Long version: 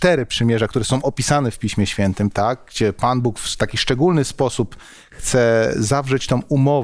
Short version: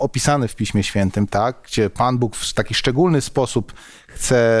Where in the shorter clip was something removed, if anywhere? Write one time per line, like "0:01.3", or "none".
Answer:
none